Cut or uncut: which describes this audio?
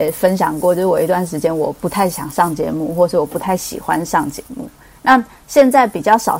uncut